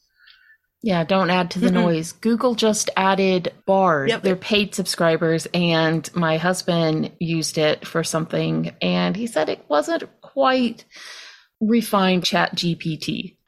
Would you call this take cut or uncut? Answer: cut